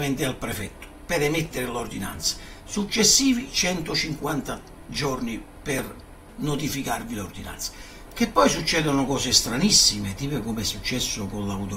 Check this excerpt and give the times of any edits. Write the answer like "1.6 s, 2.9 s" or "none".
8.1 s